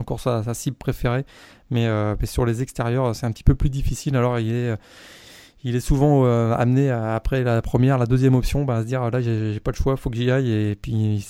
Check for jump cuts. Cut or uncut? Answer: uncut